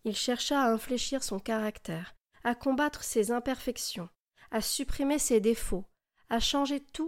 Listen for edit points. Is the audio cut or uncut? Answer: uncut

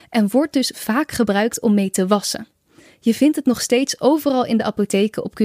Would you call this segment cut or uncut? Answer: uncut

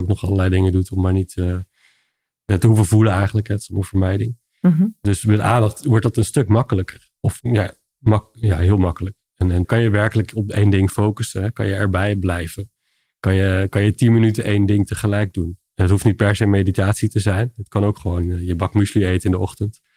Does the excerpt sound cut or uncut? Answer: cut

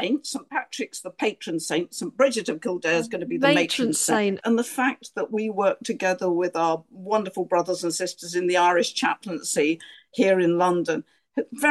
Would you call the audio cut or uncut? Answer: cut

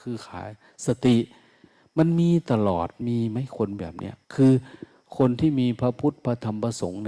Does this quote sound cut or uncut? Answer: cut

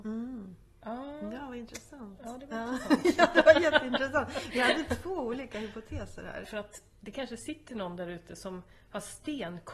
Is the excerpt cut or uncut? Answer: cut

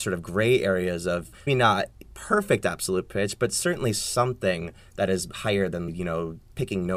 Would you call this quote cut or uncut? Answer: cut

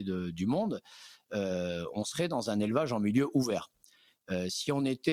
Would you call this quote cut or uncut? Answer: uncut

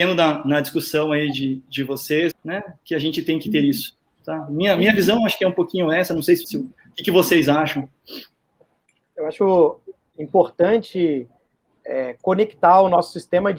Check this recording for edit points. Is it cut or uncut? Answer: cut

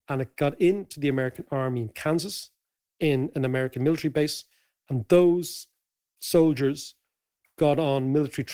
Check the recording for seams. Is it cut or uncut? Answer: uncut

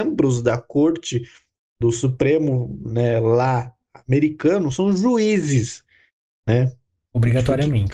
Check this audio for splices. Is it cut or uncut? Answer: uncut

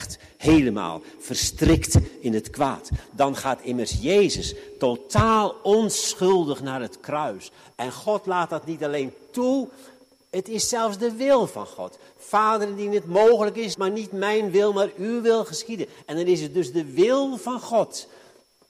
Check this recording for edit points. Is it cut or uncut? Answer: cut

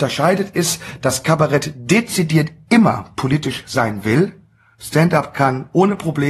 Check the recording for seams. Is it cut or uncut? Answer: uncut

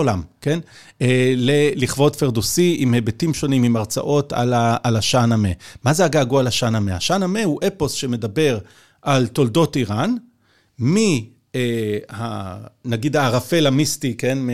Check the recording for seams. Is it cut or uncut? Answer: uncut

